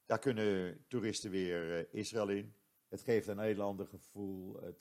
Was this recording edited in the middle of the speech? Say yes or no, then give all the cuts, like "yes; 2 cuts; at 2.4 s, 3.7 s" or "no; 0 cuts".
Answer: yes; 1 cut; at 2.7 s